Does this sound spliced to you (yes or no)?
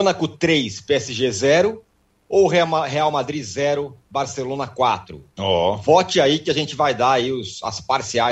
no